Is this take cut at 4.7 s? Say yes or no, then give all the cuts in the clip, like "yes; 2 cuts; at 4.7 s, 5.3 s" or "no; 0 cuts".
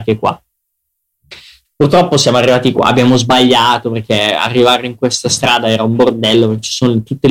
no; 1 cut; at 1.6 s